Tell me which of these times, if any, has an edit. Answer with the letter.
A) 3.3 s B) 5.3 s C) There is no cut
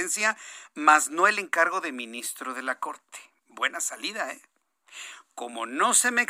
C